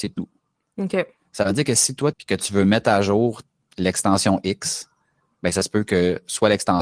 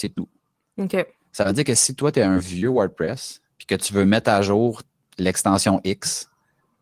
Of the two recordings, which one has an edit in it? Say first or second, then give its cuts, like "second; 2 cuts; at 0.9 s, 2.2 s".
first; 1 cut; at 2.1 s